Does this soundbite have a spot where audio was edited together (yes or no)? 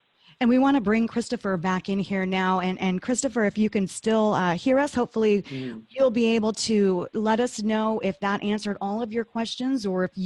no